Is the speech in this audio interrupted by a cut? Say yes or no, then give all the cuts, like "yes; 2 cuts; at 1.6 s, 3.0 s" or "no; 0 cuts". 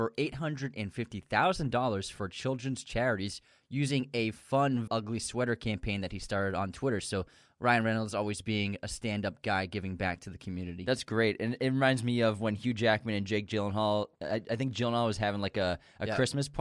yes; 1 cut; at 4.9 s